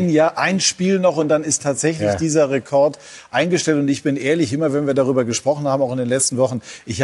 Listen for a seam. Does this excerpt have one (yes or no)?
no